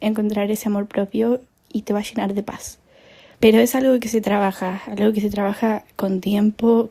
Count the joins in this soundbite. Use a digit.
1